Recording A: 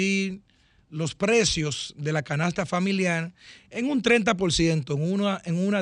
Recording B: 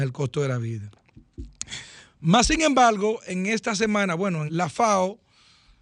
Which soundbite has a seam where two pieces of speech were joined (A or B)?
B